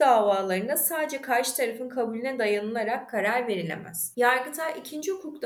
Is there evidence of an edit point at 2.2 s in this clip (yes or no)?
no